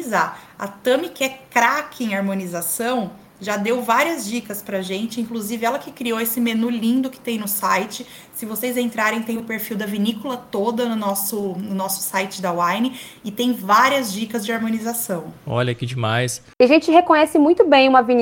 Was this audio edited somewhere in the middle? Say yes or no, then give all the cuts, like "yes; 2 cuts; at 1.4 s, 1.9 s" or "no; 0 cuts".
yes; 1 cut; at 16.5 s